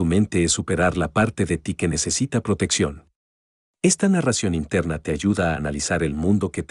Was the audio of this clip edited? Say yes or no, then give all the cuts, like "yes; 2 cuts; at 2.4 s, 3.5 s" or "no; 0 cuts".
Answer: yes; 1 cut; at 3.7 s